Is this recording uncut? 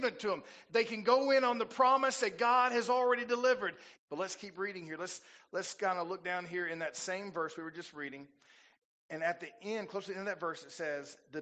no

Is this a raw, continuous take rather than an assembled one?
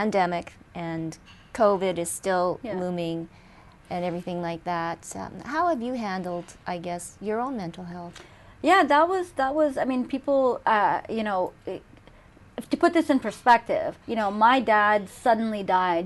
no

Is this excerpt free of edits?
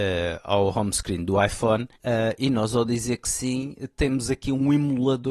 no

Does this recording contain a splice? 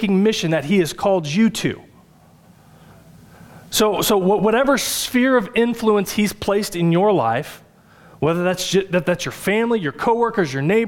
no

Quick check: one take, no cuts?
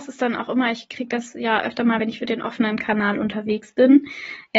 yes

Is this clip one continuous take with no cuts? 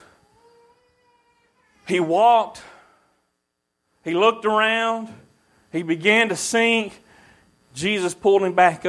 yes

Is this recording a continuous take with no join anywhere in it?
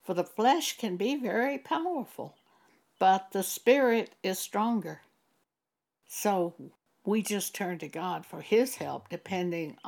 yes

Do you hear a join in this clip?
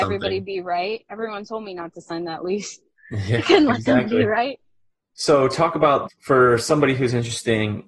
yes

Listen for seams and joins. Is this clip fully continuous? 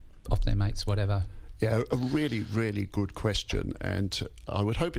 yes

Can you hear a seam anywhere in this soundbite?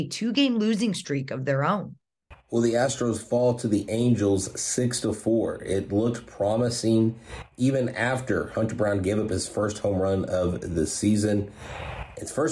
no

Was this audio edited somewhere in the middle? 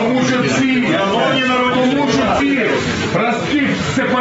yes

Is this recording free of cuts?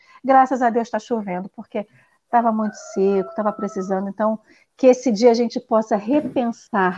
yes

